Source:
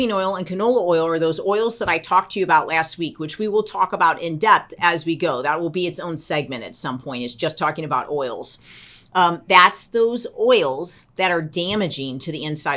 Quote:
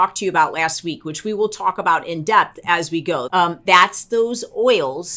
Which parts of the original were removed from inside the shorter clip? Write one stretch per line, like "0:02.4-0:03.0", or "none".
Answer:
0:05.4-0:09.1